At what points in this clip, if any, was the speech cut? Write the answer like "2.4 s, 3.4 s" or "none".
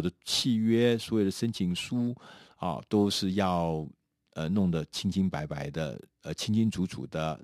none